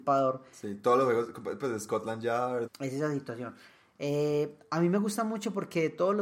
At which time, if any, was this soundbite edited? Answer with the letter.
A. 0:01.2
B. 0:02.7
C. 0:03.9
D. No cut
B